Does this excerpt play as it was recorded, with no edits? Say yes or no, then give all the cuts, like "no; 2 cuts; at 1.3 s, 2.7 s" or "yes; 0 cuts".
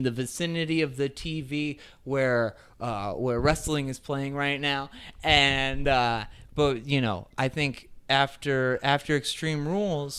yes; 0 cuts